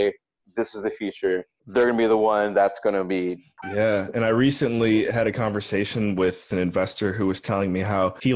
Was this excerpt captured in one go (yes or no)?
no